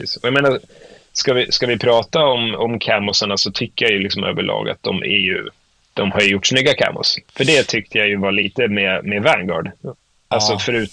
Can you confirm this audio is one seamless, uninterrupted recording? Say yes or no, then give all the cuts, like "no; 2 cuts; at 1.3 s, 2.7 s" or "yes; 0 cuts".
yes; 0 cuts